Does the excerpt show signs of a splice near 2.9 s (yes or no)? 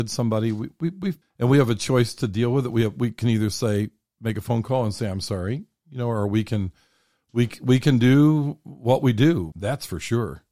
no